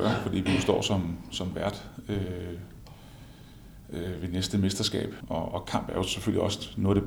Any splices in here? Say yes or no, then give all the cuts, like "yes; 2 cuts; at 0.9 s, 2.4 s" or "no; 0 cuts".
yes; 1 cut; at 5.2 s